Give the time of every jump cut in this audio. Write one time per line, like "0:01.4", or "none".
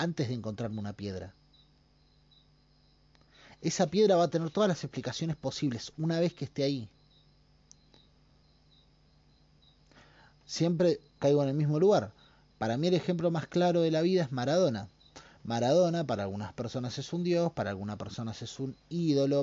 0:11.2

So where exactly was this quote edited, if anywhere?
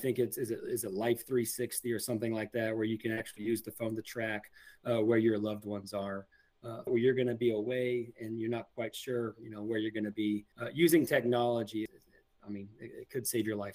0:06.9
0:10.5
0:11.9

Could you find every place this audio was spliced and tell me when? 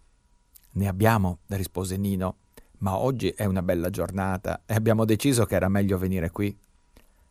none

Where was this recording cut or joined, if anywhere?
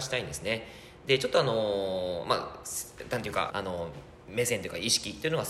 0:03.5

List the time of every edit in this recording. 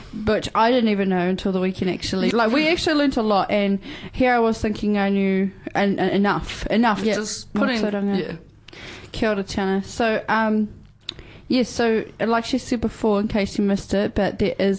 0:02.3
0:07.0

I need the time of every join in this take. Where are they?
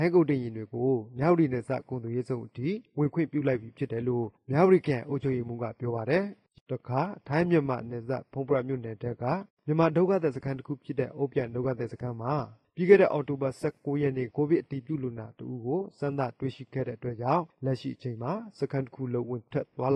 0:14.3

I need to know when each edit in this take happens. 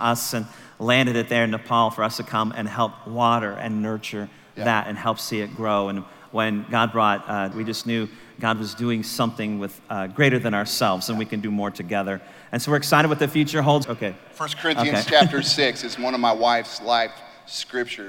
0:07.5
0:13.8

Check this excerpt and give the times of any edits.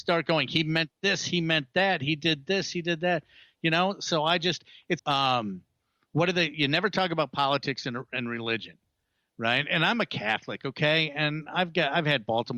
0:05.0

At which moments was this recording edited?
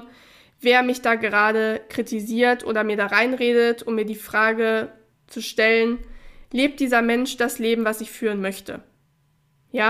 none

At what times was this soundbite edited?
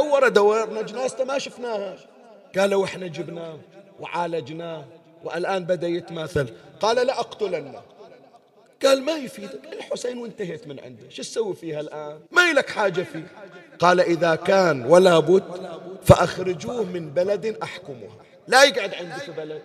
0:12.3

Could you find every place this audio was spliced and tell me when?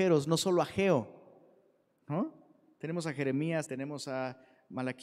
0:03.7

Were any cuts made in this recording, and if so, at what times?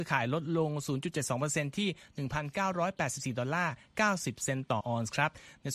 0:04.8

